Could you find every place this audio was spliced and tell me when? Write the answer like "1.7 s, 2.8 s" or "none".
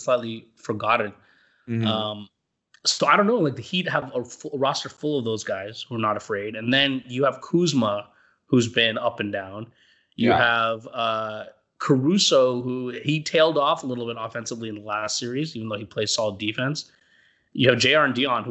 none

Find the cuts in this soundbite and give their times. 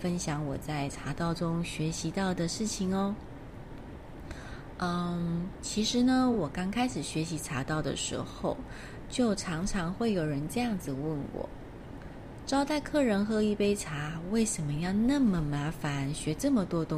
none

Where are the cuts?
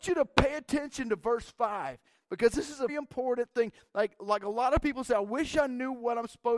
2.9 s

